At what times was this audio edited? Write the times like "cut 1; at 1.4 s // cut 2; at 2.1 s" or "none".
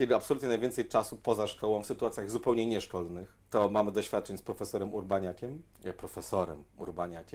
cut 1; at 3.4 s // cut 2; at 5.7 s